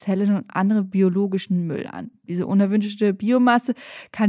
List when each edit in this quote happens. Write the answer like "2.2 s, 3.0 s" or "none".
none